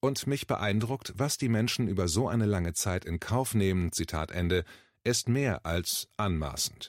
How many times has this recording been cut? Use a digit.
0